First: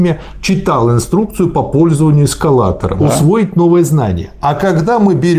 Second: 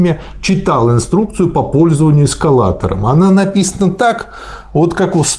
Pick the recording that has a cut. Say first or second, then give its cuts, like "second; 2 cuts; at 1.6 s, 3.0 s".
first; 1 cut; at 3.0 s